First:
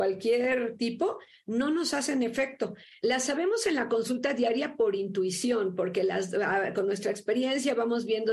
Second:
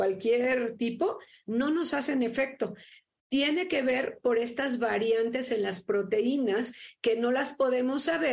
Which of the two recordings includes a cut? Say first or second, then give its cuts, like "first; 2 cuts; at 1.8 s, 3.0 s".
first; 1 cut; at 3.0 s